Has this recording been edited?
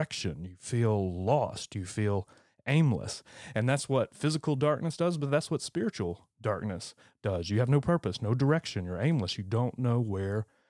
no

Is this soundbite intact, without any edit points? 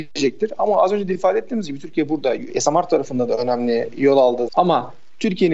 no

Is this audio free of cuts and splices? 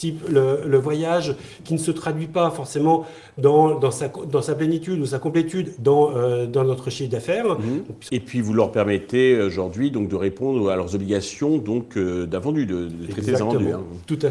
no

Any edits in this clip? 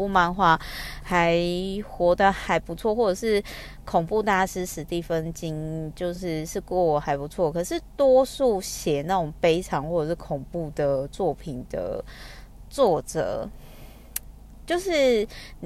no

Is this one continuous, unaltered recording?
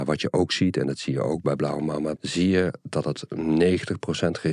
no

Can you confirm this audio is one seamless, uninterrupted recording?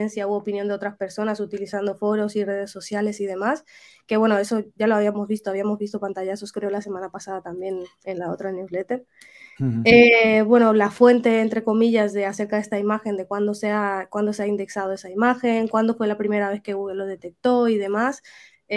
yes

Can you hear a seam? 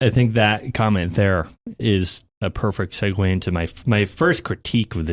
no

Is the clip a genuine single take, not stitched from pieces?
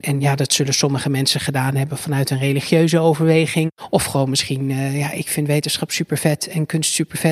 yes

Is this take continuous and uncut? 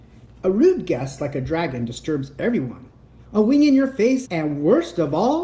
no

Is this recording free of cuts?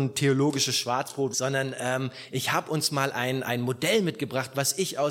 no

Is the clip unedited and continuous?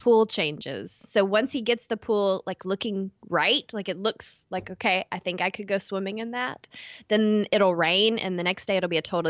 yes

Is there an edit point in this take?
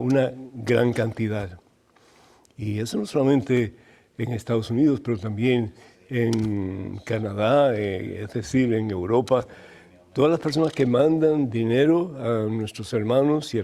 no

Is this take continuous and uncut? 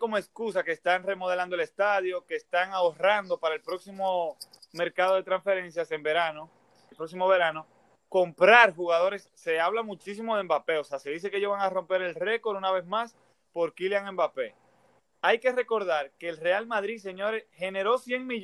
no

